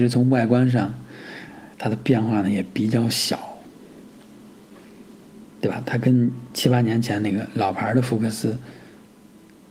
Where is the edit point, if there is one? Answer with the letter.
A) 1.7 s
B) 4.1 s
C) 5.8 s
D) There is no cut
A